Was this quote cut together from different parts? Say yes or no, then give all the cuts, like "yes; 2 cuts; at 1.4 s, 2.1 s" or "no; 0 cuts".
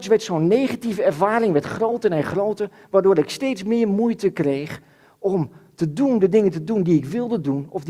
no; 0 cuts